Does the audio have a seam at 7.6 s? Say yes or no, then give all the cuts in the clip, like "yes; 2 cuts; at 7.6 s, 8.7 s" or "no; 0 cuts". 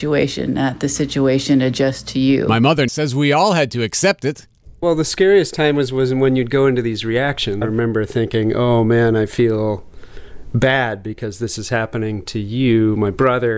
yes; 3 cuts; at 2.9 s, 4.8 s, 7.6 s